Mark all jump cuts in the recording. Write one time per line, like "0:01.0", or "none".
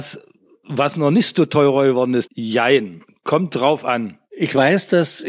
0:02.3

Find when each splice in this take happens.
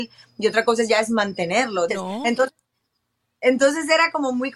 0:01.9

